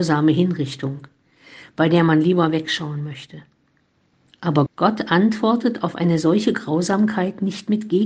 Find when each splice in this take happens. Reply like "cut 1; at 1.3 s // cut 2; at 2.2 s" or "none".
cut 1; at 4.7 s